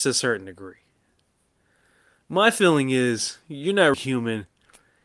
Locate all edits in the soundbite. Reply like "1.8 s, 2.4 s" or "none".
3.9 s